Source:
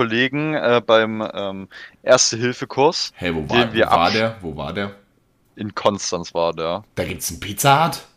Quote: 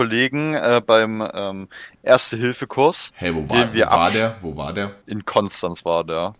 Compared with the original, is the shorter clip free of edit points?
no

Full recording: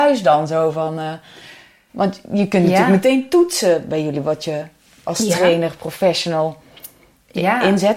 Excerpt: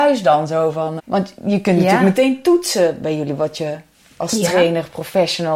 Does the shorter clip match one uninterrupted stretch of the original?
no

